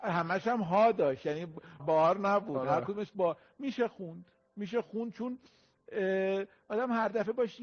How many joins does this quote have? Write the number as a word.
one